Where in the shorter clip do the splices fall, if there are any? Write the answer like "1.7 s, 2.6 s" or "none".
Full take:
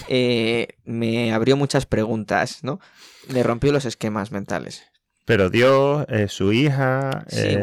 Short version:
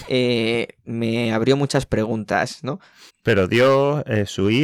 3.1 s